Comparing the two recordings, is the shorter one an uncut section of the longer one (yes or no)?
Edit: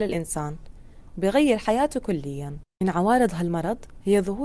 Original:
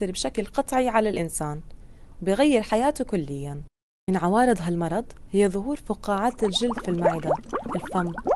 no